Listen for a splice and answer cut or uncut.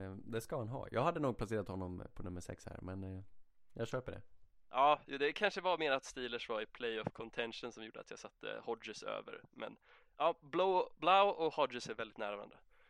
uncut